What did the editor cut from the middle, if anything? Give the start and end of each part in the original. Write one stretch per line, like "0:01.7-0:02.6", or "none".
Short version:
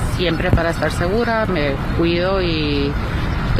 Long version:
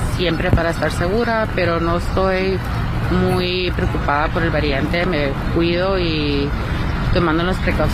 0:01.5-0:05.1